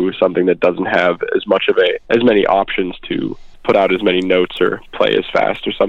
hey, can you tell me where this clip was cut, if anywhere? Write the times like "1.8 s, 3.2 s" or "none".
2.0 s, 3.5 s